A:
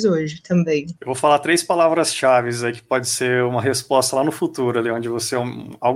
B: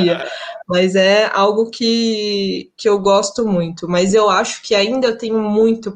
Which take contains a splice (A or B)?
A